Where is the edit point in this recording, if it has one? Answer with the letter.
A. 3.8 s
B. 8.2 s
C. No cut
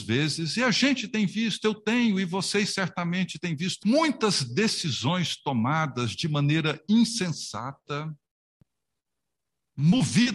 A